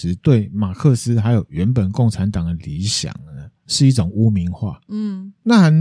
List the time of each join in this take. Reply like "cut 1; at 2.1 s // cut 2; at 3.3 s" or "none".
none

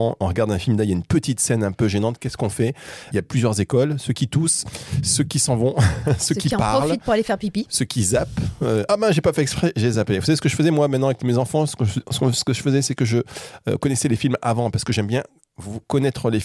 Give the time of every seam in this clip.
cut 1; at 3.1 s

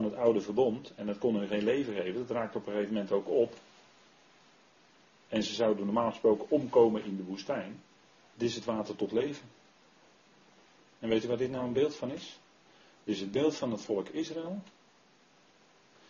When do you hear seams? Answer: cut 1; at 8.2 s

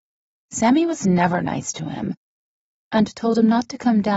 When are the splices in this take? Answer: cut 1; at 2.8 s

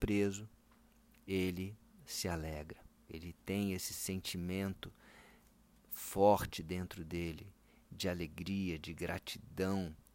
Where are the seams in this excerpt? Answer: cut 1; at 3.1 s

